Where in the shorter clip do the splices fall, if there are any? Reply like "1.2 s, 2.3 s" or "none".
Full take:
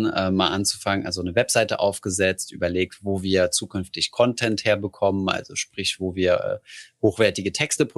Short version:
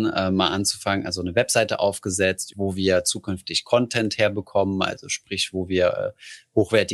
2.5 s